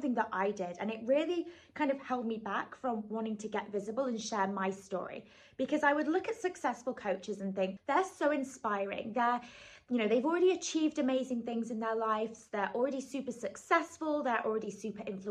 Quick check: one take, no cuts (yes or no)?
no